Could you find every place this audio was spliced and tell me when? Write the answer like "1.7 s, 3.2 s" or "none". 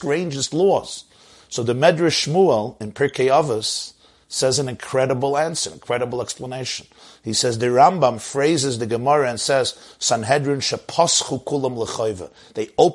none

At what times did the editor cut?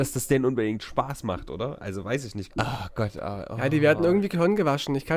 2.5 s

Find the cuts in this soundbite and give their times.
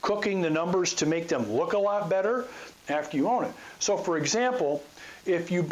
2.7 s

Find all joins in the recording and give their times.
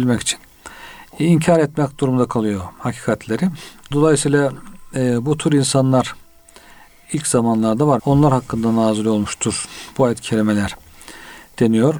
3.9 s, 8.0 s

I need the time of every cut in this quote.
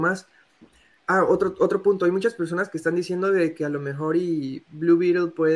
none

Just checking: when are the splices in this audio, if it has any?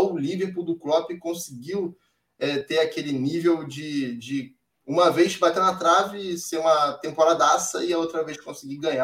none

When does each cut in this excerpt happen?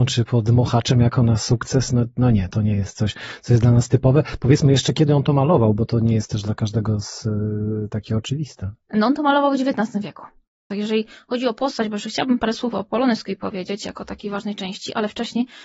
10.7 s

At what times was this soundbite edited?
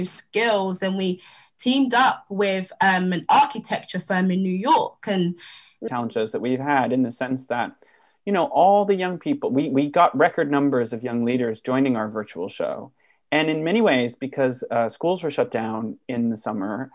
5.9 s

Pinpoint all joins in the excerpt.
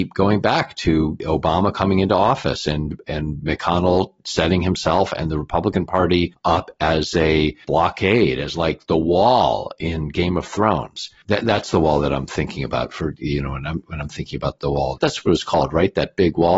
none

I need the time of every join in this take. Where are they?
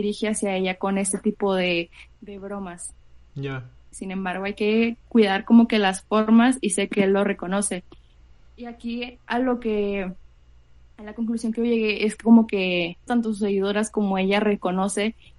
3.9 s, 13.1 s

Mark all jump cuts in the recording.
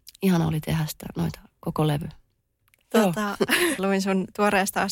3.8 s

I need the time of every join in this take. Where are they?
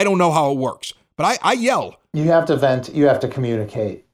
none

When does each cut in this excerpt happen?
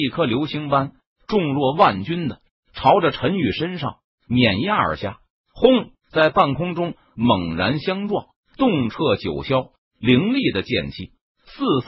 6.0 s, 8.4 s

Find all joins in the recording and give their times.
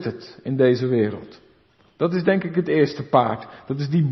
none

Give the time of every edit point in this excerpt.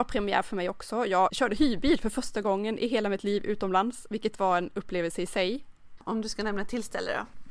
1.3 s, 6.0 s

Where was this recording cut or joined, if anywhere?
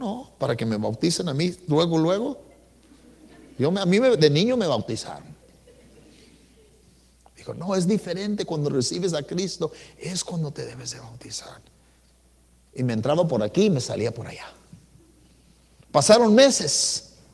none

